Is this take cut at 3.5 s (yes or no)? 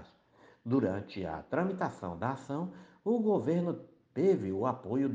no